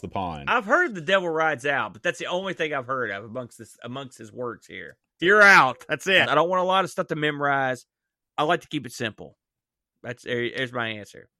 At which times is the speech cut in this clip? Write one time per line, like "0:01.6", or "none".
0:05.2
0:06.2